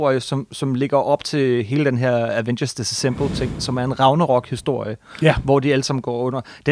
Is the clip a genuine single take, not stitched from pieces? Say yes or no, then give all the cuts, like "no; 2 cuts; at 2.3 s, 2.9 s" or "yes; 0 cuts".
yes; 0 cuts